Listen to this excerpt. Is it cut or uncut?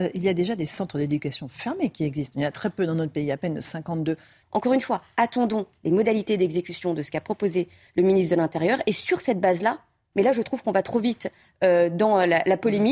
cut